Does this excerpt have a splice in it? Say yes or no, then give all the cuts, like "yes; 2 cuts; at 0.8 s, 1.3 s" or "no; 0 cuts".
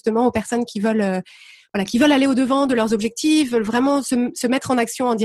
no; 0 cuts